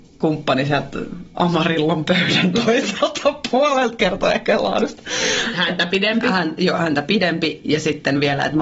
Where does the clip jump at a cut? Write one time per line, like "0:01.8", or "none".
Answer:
0:05.5